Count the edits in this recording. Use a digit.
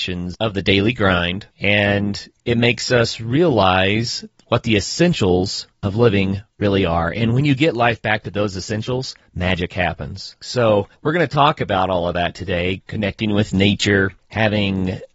2